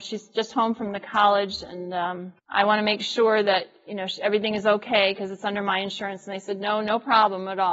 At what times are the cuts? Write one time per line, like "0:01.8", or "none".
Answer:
0:02.4